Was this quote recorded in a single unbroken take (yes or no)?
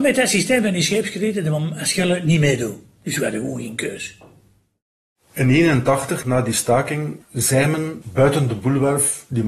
no